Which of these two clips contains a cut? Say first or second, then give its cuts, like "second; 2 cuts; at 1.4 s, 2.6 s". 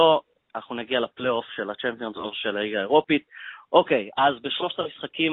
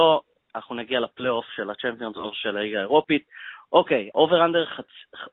second; 1 cut; at 4.1 s